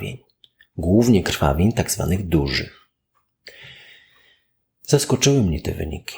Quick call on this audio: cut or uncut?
uncut